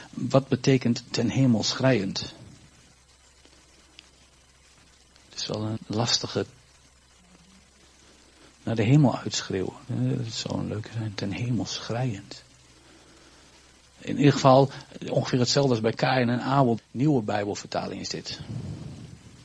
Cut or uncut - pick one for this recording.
cut